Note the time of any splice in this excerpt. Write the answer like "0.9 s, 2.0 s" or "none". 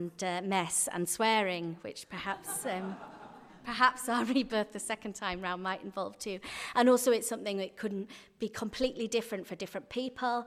none

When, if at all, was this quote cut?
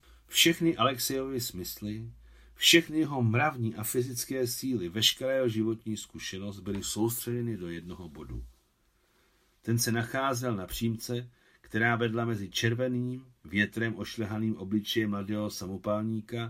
none

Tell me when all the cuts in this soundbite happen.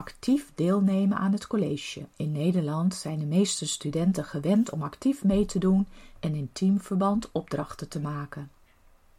2.1 s

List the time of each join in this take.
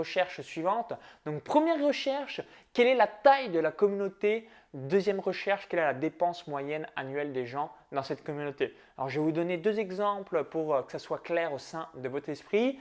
none

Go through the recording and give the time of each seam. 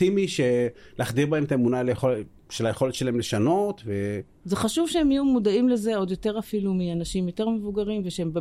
none

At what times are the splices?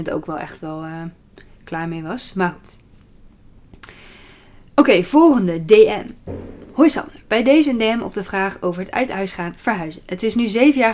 none

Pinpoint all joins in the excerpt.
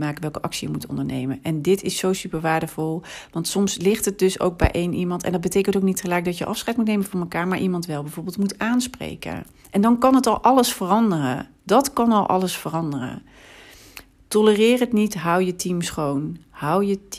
none

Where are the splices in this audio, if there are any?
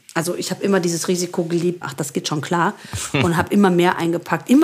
1.8 s

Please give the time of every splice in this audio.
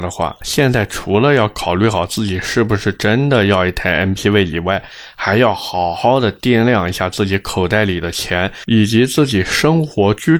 none

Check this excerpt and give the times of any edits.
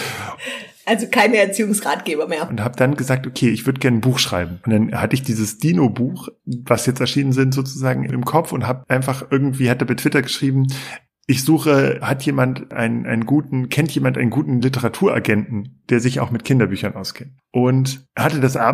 2.5 s

